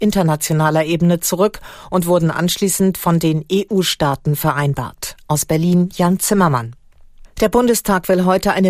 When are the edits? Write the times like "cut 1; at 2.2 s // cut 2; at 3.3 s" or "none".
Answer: cut 1; at 7.2 s